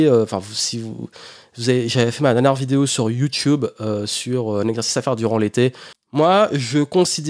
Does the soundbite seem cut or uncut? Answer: cut